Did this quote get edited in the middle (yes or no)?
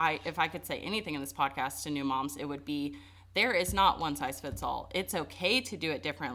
no